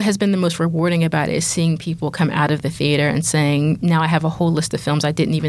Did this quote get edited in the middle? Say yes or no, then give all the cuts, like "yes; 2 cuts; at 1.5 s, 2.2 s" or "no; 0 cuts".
no; 0 cuts